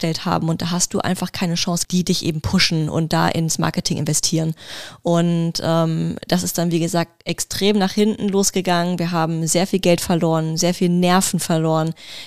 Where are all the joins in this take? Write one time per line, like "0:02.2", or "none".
0:01.8